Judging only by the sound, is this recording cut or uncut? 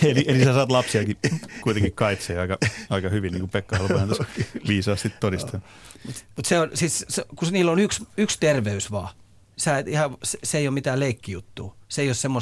uncut